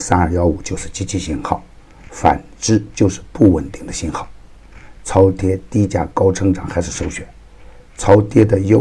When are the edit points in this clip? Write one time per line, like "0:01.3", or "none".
none

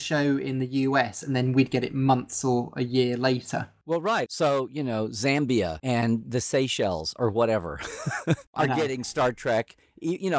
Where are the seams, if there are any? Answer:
0:04.3

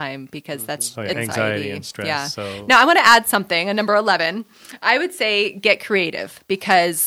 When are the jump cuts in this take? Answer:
0:01.1

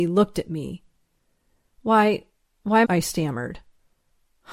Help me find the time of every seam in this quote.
0:01.7
0:02.8

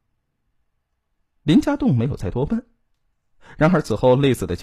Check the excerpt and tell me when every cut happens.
none

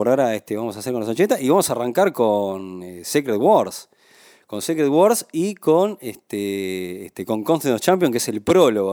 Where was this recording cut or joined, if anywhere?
none

